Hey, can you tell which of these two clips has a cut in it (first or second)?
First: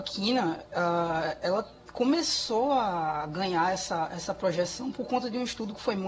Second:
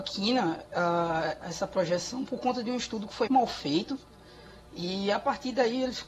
second